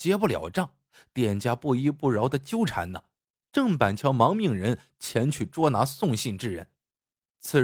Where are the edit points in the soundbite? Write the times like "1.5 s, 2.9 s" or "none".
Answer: 3.5 s